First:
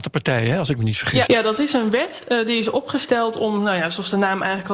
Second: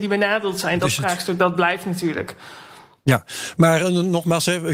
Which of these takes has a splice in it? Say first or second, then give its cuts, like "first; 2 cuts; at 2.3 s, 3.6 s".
first; 1 cut; at 1.3 s